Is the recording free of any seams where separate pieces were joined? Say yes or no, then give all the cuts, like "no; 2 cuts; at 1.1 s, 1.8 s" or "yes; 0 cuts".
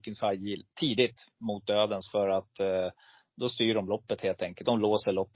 yes; 0 cuts